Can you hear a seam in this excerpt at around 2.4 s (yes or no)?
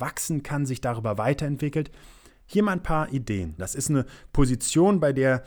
no